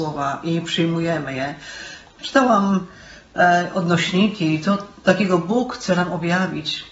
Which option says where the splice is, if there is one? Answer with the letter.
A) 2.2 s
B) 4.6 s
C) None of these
A